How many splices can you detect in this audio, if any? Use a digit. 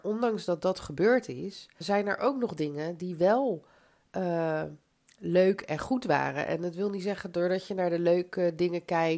1